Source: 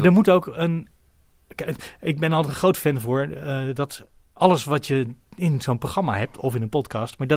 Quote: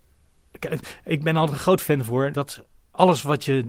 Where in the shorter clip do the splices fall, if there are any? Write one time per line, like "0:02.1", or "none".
0:02.3

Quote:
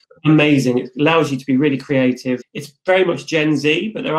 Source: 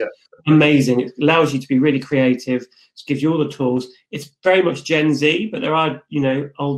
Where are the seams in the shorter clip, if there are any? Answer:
0:02.4

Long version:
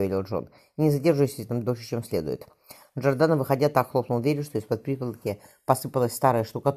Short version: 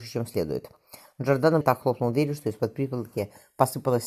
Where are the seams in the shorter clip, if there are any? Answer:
0:01.6

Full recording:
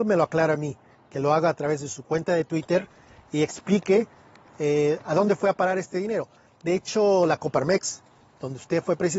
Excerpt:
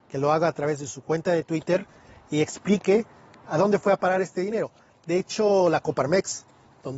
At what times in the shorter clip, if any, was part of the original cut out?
0:03.5

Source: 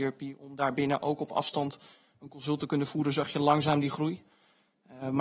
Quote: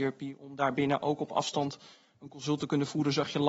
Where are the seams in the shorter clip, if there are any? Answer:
none

